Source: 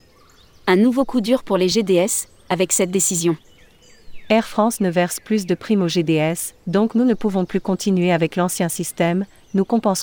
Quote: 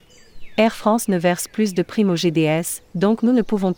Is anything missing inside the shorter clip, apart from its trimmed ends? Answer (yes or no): no